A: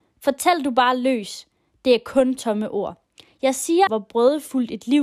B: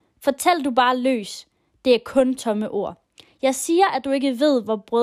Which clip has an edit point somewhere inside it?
A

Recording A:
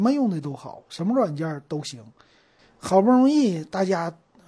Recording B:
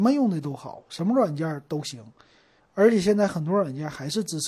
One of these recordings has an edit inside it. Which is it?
A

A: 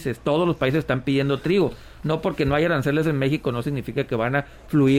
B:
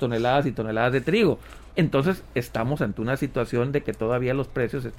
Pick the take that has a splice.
B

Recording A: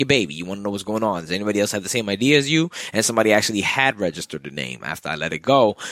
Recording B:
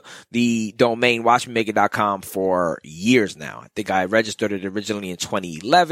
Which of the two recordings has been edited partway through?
A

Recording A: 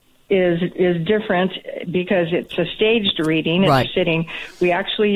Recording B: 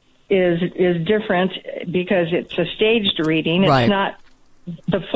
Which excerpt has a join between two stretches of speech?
A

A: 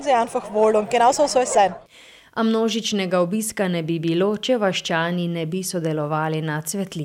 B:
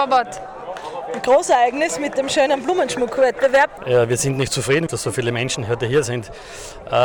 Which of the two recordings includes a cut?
B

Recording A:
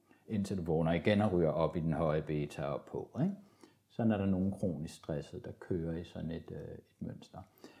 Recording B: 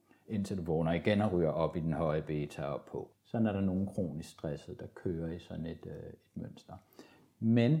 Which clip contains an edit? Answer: B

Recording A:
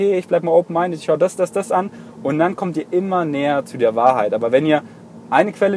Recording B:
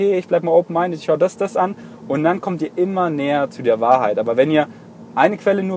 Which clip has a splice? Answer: B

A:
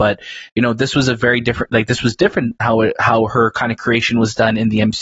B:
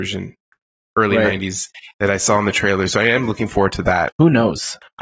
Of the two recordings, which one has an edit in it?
B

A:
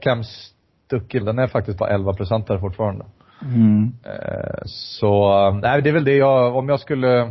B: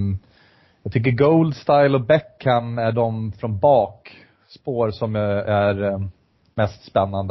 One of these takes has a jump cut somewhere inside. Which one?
A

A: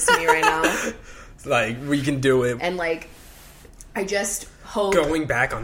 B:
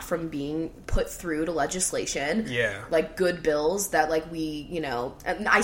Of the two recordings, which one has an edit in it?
A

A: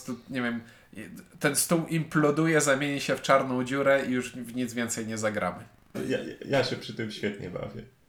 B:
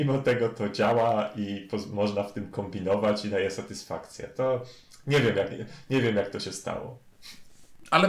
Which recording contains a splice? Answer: A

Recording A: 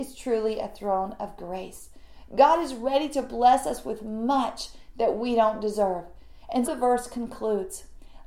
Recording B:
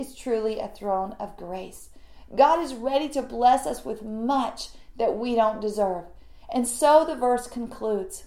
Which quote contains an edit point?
A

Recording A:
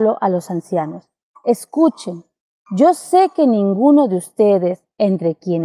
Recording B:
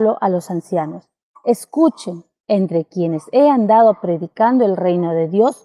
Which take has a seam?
B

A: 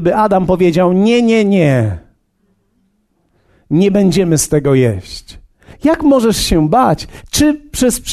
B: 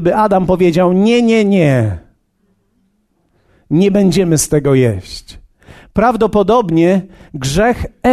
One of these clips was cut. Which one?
A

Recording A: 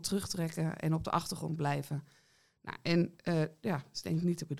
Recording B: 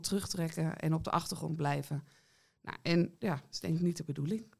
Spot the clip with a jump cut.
B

